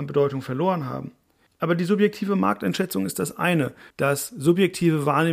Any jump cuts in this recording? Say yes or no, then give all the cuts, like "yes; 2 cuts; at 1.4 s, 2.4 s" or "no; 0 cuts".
yes; 2 cuts; at 1.5 s, 3.9 s